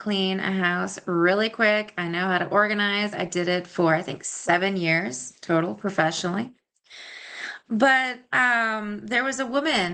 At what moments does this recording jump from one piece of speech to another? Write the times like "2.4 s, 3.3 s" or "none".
none

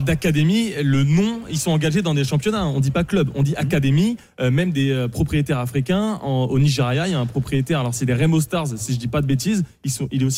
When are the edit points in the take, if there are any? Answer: none

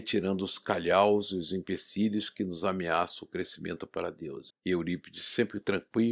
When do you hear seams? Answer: 4.5 s

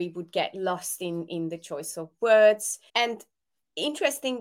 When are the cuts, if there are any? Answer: 2.9 s

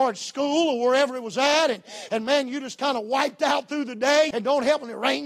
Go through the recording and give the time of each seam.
4.3 s

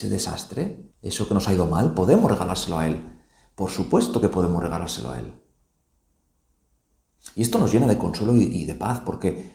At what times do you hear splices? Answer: 0.9 s

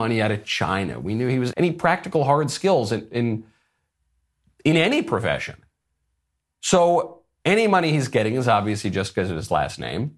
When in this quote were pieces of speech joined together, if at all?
1.5 s

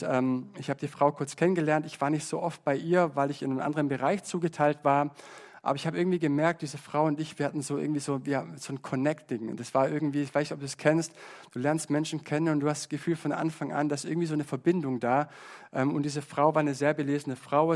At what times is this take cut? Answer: none

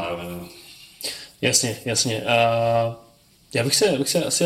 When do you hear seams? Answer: none

